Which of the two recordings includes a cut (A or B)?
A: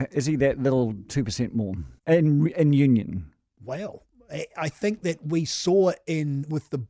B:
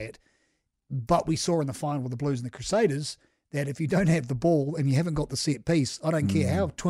A